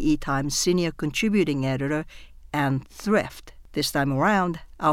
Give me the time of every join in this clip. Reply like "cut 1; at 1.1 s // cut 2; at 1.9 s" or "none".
none